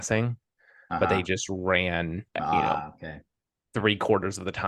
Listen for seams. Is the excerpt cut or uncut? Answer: cut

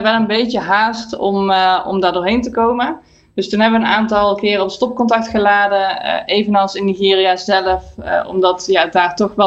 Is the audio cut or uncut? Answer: uncut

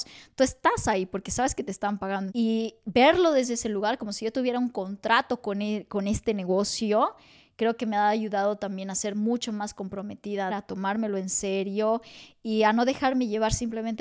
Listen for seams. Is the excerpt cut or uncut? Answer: cut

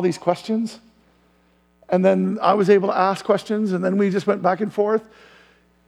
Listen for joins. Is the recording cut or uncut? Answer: uncut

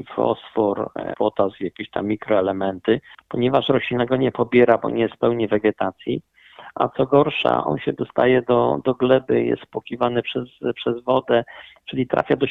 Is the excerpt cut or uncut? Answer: cut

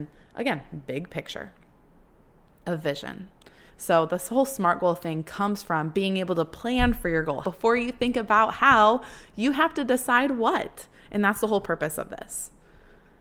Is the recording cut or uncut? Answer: cut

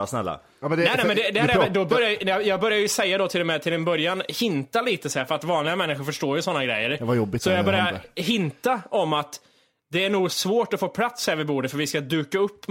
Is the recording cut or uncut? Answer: uncut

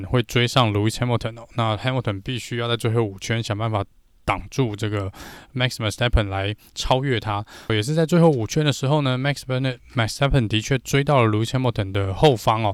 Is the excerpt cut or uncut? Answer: cut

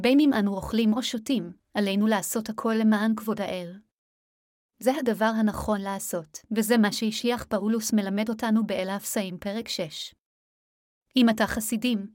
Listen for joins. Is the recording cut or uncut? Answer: cut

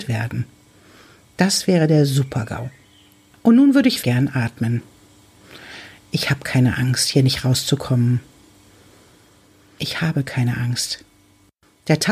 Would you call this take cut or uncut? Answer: cut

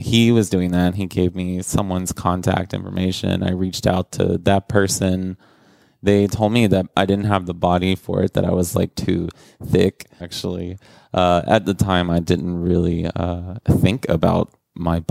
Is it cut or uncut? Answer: cut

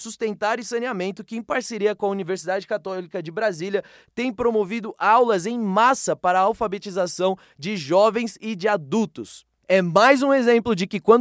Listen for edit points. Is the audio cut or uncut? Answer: uncut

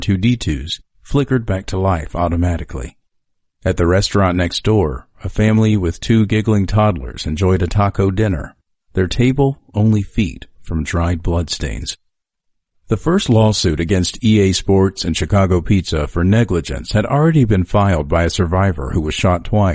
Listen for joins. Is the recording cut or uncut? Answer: uncut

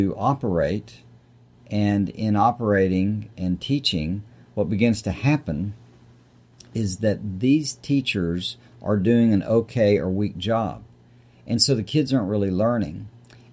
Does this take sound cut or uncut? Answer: uncut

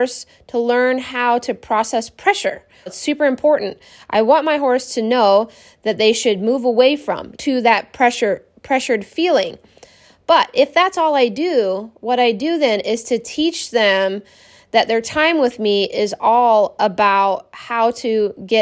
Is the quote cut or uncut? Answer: cut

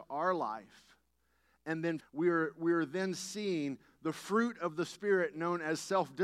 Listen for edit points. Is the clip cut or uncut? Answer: cut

